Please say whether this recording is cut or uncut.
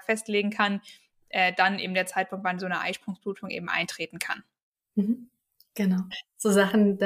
cut